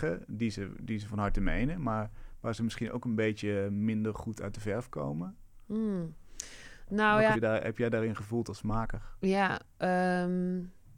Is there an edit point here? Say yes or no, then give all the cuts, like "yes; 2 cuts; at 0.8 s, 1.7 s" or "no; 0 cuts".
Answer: yes; 1 cut; at 7.3 s